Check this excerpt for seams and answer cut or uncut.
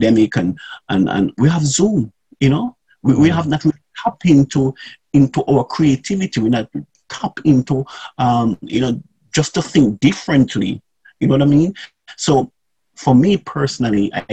uncut